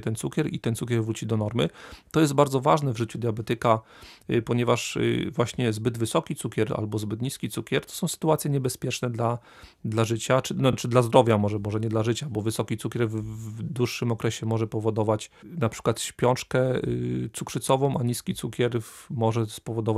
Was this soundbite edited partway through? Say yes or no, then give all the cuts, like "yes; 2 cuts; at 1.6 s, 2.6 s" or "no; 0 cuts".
no; 0 cuts